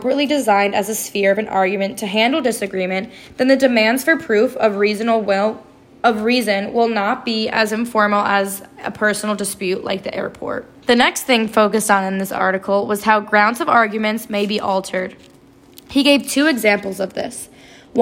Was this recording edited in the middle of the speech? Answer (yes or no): yes